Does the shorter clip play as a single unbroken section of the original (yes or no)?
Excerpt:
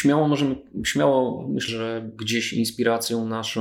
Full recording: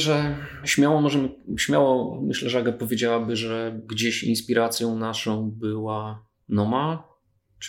no